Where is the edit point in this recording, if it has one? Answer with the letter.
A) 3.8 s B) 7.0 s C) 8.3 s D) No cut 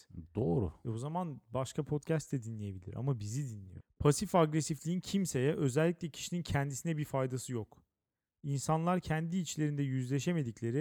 A